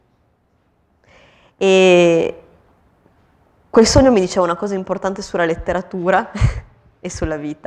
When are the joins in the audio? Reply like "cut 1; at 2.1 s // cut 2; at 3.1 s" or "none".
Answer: none